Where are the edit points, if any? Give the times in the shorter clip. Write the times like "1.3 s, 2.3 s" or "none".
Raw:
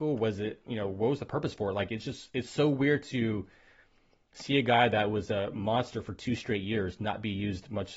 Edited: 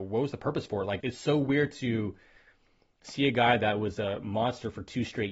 1.0 s